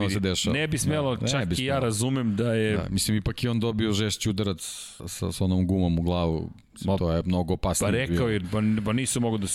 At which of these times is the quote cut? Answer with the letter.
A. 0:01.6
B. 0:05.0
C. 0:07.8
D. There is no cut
B